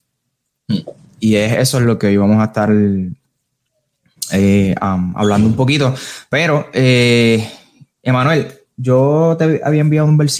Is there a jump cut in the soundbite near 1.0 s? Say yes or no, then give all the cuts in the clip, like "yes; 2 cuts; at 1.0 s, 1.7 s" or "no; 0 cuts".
yes; 1 cut; at 1.0 s